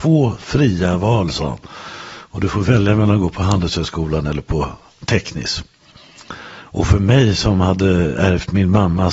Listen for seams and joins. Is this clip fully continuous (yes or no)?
yes